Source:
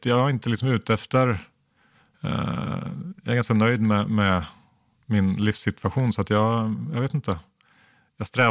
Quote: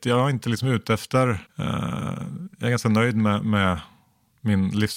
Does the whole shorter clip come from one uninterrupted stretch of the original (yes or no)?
no